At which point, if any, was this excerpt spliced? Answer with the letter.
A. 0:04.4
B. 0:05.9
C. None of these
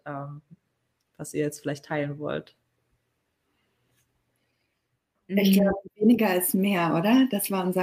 C